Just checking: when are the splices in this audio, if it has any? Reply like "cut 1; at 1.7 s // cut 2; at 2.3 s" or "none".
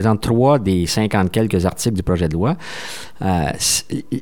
none